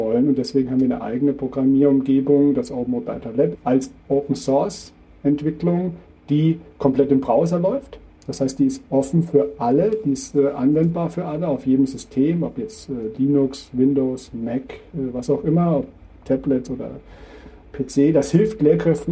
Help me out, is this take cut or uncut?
cut